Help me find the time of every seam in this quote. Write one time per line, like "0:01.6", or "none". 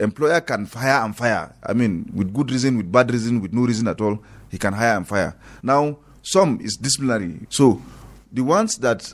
0:05.6
0:07.5